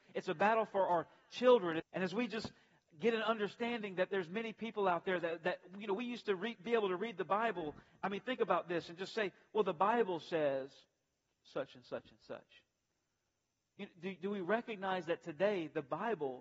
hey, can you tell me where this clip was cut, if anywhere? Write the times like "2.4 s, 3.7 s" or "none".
1.8 s